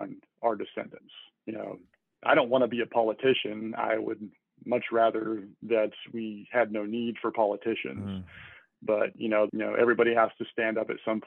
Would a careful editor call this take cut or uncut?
cut